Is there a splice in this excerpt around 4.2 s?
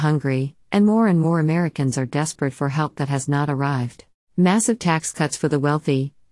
yes; 1 cut; at 4.2 s

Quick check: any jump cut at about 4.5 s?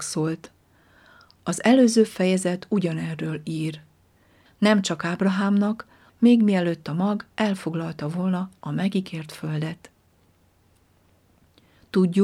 yes; 2 cuts; at 4.5 s, 6.1 s

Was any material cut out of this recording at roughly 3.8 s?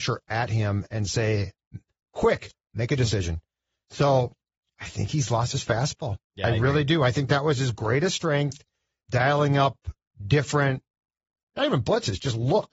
no; 0 cuts

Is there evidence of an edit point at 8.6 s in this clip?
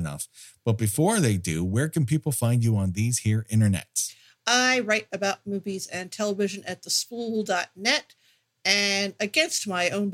no; 0 cuts

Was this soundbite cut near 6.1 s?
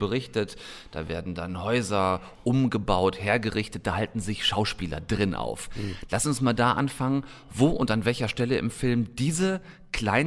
yes; 1 cut; at 6.1 s

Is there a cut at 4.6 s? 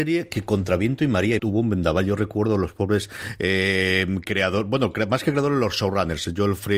no; 1 cut; at 1.4 s

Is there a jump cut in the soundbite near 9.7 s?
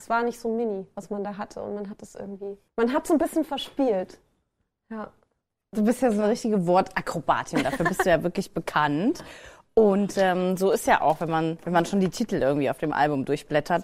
no; 0 cuts

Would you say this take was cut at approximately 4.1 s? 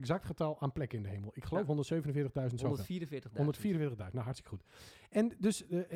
no; 0 cuts

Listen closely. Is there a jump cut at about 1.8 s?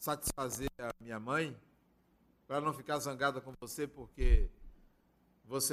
no; 0 cuts

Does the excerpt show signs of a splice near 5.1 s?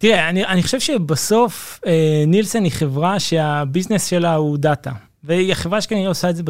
no; 0 cuts

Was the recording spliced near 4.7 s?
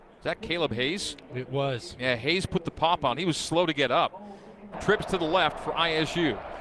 yes; 1 cut; at 4.7 s

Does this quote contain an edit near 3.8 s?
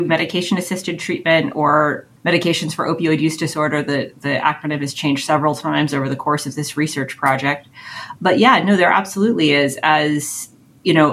no; 0 cuts

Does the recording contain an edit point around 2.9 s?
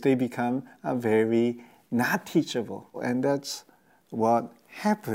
yes; 1 cut; at 2.9 s

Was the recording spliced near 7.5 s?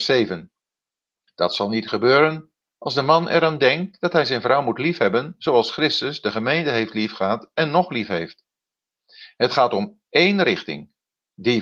no; 2 cuts; at 1.3 s, 9.3 s

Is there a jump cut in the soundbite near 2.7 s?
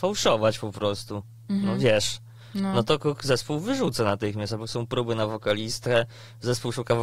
no; 0 cuts

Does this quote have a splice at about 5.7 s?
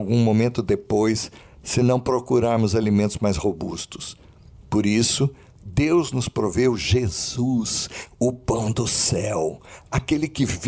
no; 0 cuts

